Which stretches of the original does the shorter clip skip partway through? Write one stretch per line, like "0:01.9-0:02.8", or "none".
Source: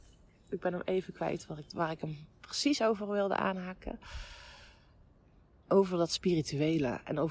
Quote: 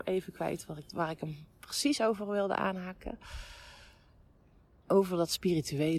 none